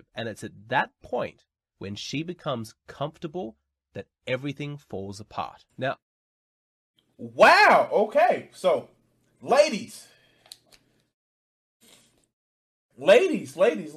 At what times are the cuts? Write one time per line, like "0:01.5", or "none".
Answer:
none